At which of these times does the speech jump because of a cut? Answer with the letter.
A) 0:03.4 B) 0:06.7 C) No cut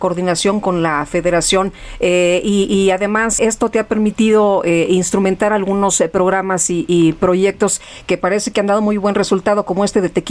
A